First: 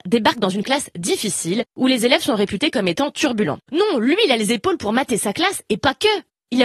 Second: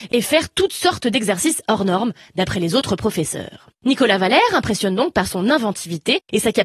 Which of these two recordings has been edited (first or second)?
first